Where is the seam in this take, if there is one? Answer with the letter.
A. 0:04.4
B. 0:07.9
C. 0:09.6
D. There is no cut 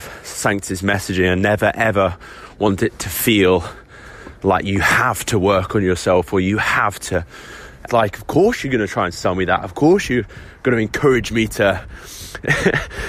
B